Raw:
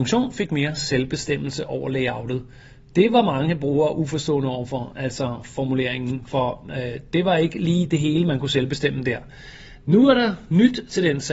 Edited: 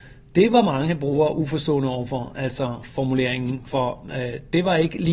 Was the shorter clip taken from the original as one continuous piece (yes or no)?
yes